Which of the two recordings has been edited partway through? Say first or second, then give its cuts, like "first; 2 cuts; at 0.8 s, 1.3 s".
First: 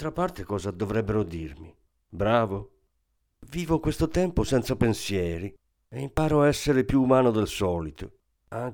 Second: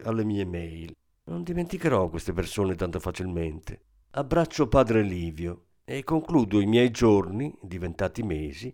second; 2 cuts; at 1.1 s, 4.0 s